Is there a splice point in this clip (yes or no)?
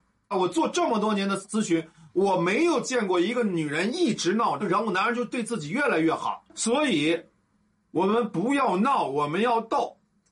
no